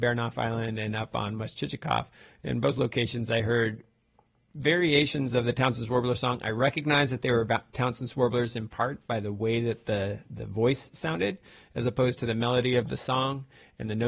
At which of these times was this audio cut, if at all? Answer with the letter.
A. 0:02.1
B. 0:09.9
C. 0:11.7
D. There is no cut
D